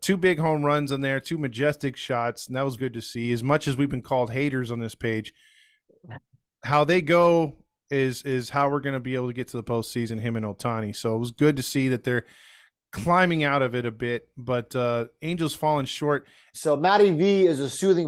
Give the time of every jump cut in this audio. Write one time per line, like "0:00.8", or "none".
0:02.8
0:16.5